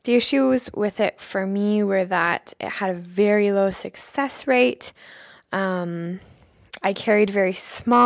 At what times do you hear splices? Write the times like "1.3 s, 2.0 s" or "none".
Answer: none